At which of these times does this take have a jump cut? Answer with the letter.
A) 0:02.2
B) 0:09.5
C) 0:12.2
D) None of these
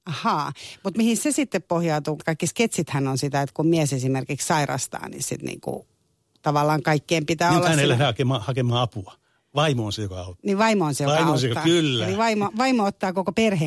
A